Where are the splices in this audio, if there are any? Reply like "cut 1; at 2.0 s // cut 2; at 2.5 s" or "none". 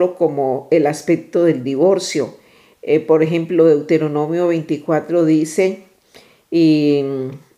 none